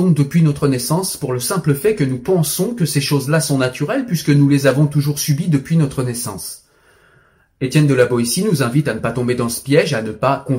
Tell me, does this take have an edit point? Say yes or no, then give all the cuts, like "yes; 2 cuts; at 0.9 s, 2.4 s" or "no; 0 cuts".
no; 0 cuts